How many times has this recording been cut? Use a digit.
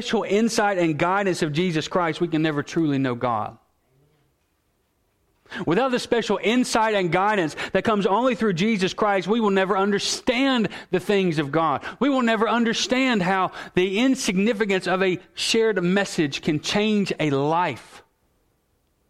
0